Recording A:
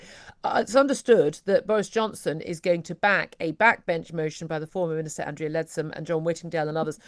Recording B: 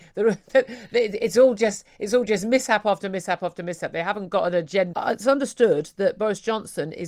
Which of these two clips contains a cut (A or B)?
B